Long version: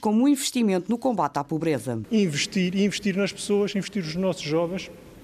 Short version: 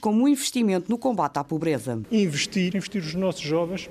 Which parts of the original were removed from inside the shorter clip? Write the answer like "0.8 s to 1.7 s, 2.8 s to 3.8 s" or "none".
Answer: 2.7 s to 3.7 s